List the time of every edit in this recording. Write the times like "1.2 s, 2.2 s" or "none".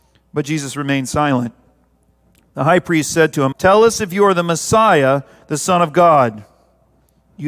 3.5 s